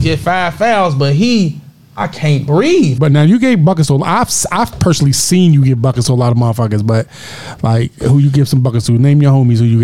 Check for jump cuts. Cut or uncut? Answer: cut